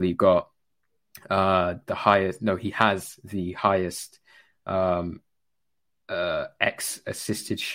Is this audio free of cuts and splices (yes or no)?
yes